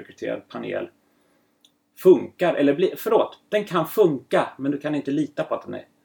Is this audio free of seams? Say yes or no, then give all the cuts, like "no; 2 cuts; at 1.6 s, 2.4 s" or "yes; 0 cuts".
yes; 0 cuts